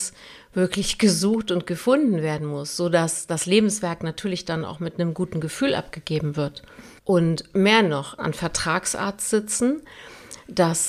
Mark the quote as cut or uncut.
cut